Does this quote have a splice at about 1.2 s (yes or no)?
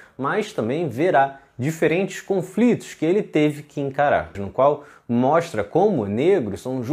no